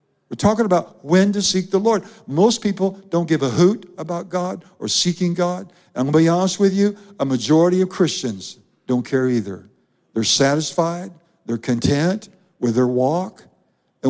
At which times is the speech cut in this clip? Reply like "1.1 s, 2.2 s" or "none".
none